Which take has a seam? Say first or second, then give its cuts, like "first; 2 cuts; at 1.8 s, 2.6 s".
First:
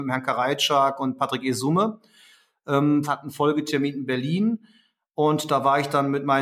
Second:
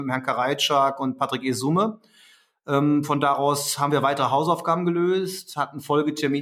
first; 1 cut; at 3.0 s